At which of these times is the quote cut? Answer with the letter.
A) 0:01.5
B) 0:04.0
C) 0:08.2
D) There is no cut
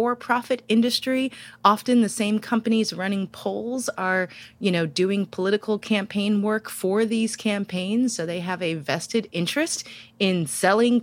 D